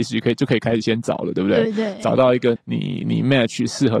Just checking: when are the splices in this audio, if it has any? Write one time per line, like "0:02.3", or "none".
0:02.6